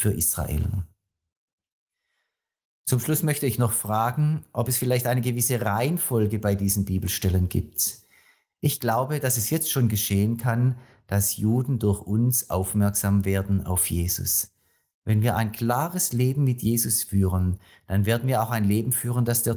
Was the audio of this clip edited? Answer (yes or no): no